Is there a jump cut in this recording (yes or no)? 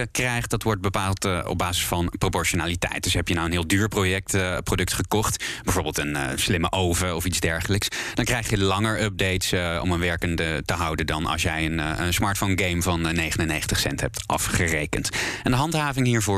no